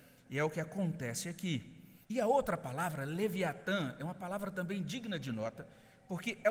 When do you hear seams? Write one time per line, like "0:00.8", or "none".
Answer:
0:02.0

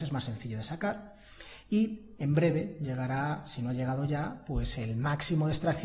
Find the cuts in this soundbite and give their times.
none

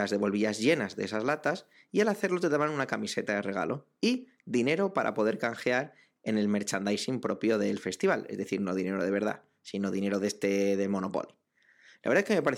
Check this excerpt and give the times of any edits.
none

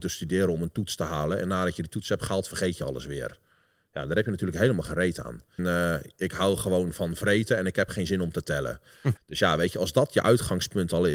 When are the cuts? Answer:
0:05.6
0:09.2

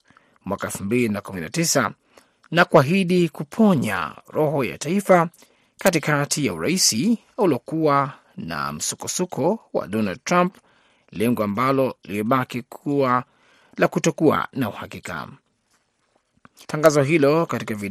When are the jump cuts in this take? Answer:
0:16.6

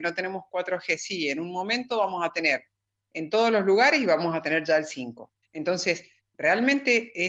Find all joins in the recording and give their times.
0:05.4

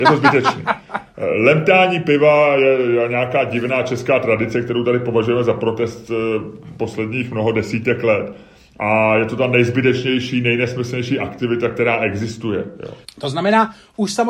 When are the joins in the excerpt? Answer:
0:13.0

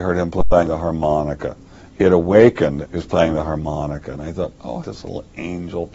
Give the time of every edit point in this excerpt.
0:02.8
0:04.8

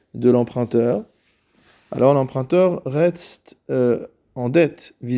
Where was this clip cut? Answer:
none

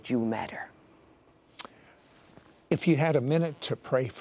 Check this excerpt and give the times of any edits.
none

